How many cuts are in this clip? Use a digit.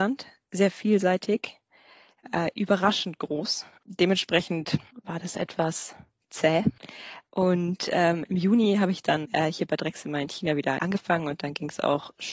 2